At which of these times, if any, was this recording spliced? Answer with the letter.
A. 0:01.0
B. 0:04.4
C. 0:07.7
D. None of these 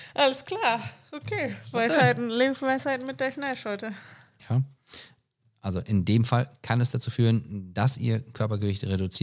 B